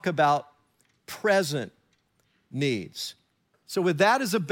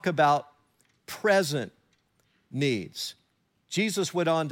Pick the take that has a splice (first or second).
first